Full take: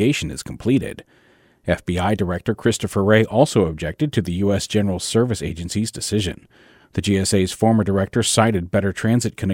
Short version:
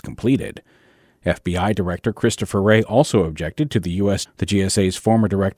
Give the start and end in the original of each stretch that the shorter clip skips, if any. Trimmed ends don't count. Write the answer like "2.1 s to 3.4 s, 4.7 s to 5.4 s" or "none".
4.7 s to 6.8 s